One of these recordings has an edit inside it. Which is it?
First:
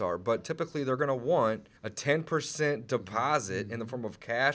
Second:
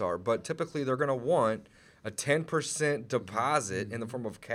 first; 1 cut; at 1.8 s

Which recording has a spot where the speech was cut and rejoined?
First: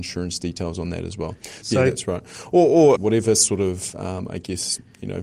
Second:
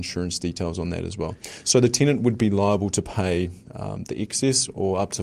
first; 2 cuts; at 1.6 s, 3.0 s

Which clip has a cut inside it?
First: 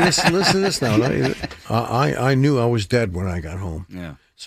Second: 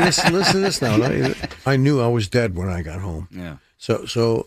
second; 1 cut; at 1.7 s

